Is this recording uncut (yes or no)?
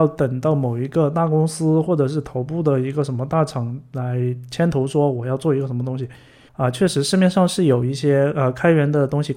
no